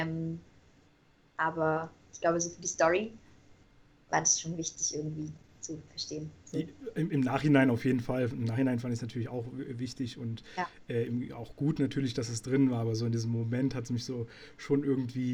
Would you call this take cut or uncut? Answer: uncut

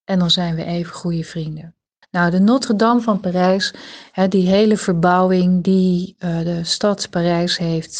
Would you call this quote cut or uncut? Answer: cut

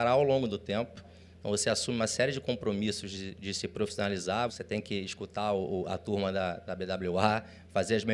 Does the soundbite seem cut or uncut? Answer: cut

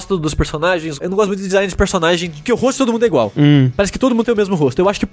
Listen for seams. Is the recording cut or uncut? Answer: uncut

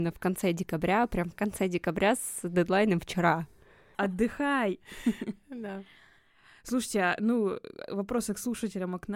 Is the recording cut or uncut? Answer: cut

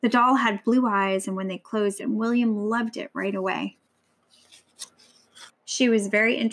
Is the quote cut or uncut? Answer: cut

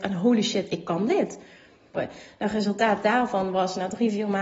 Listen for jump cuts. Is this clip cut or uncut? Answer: cut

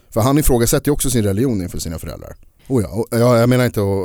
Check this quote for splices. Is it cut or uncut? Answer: cut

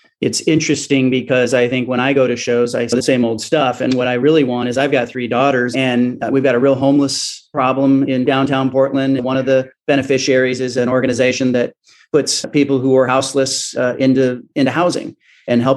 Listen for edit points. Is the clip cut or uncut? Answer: cut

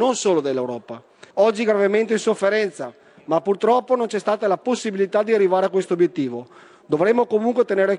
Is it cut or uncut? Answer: cut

